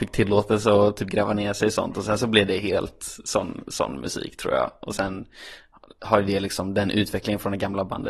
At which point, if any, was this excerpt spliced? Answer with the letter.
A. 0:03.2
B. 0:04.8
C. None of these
C